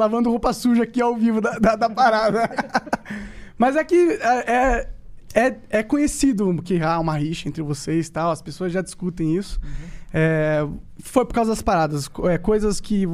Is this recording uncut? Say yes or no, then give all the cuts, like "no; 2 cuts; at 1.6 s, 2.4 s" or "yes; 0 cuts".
yes; 0 cuts